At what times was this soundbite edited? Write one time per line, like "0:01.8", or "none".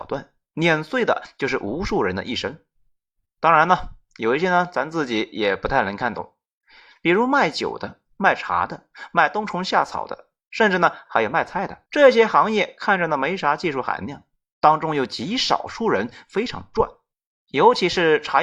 0:11.9